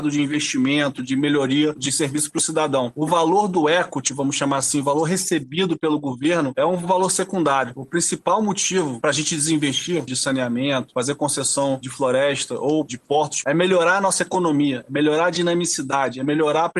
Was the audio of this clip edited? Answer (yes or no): yes